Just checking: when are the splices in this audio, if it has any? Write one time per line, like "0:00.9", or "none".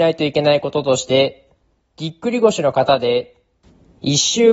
0:01.8